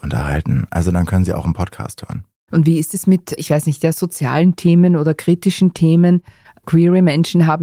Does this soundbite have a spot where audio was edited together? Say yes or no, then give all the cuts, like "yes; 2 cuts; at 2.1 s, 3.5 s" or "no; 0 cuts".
no; 0 cuts